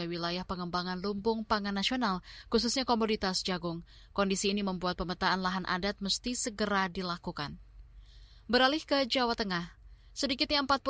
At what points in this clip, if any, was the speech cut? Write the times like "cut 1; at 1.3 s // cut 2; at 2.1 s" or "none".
none